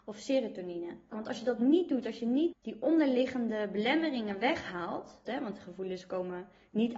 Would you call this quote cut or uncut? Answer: cut